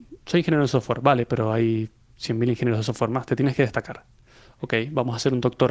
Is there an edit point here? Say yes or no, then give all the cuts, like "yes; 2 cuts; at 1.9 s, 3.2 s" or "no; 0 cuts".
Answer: no; 0 cuts